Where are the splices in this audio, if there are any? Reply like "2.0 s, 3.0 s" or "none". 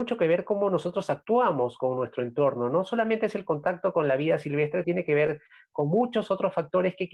4.8 s

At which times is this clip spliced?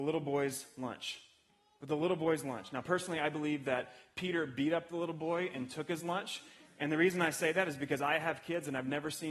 none

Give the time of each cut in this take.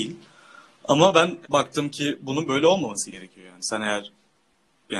1.4 s

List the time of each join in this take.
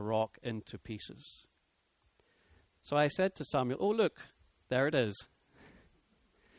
none

